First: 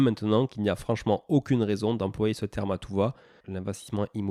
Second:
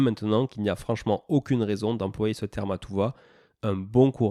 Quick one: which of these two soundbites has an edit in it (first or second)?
first